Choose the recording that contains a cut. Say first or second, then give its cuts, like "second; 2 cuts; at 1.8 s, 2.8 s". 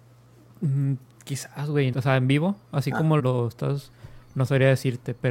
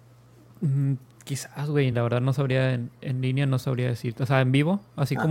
first; 2 cuts; at 1.9 s, 3.2 s